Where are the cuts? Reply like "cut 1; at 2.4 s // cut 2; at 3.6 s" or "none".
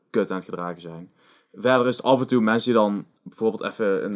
cut 1; at 3.2 s